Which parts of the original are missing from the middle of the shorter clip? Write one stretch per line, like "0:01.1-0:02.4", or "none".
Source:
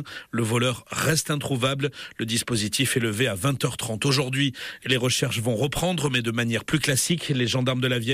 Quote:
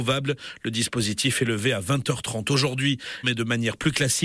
0:04.8-0:06.1